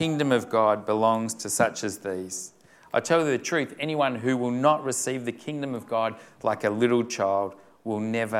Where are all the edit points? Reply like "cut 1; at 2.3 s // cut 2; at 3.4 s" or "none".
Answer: none